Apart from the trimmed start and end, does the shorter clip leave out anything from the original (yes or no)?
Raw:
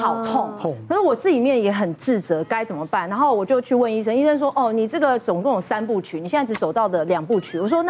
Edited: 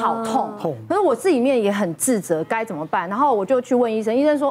no